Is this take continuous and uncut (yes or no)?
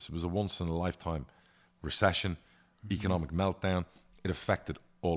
yes